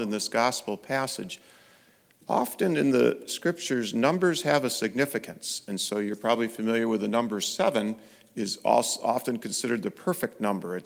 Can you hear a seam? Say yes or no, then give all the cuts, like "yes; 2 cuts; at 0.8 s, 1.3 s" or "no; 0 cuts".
no; 0 cuts